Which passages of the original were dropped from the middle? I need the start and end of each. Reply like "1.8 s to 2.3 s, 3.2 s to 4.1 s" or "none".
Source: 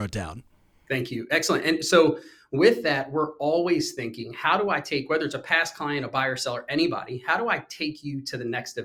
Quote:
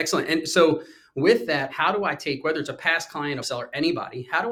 3.1 s to 4.3 s, 6.1 s to 6.4 s